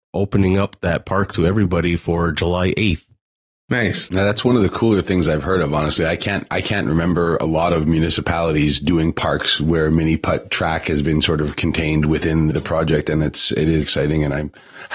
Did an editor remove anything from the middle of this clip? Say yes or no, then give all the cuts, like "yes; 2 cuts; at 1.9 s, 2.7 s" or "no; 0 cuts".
yes; 3 cuts; at 4.1 s, 12.5 s, 13.8 s